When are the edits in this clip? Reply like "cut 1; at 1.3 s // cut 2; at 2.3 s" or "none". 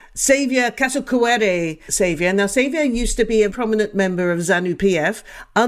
cut 1; at 1.9 s // cut 2; at 3.5 s